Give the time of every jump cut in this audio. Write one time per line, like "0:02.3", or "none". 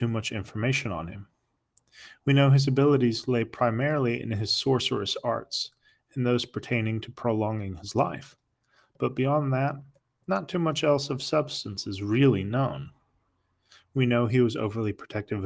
none